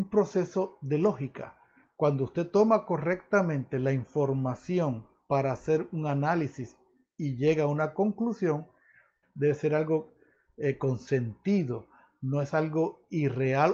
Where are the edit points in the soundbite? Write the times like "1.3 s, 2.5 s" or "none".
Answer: 9.2 s